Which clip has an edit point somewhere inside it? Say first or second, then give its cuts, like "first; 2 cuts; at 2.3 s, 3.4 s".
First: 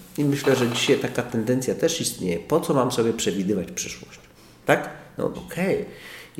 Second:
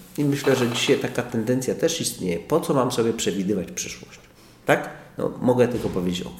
first; 1 cut; at 5.3 s